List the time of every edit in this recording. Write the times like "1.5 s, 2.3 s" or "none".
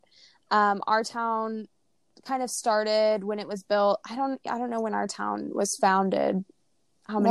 none